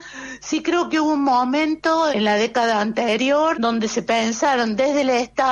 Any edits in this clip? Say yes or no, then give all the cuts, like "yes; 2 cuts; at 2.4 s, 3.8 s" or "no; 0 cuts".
yes; 2 cuts; at 2.1 s, 3.5 s